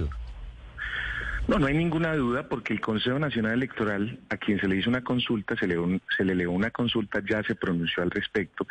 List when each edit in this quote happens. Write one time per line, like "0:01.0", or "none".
none